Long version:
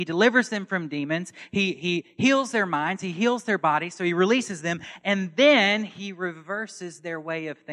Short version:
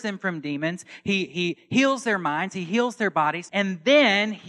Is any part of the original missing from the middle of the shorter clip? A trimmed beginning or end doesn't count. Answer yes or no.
yes